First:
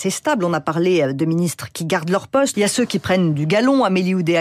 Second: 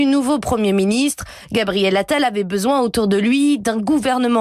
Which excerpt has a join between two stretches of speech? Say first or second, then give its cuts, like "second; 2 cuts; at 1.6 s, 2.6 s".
first; 1 cut; at 2.5 s